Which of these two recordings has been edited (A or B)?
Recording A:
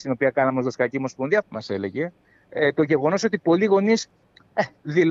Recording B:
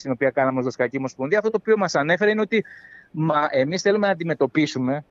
A